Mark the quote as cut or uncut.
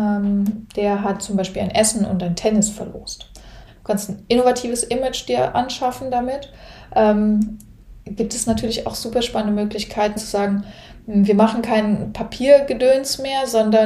cut